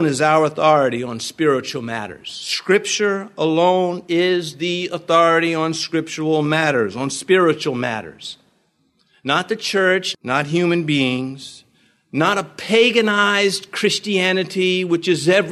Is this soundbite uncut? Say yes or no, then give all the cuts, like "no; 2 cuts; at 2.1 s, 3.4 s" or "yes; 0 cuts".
no; 1 cut; at 10.1 s